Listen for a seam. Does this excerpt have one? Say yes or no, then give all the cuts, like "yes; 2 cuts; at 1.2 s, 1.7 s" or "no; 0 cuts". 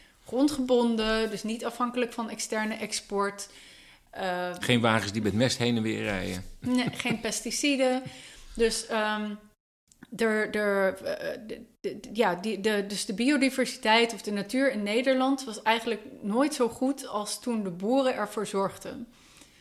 no; 0 cuts